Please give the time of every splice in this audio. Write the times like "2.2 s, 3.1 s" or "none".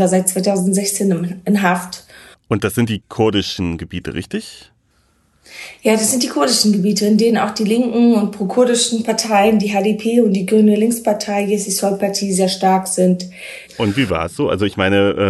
2.3 s, 13.7 s